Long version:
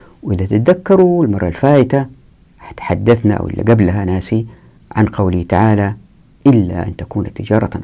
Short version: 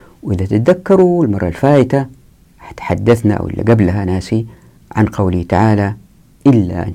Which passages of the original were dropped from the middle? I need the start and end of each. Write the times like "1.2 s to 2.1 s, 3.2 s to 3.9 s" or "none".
none